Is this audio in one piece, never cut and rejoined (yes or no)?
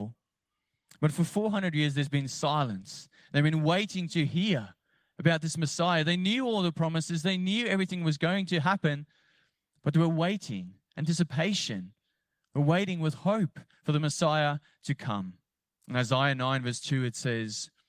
no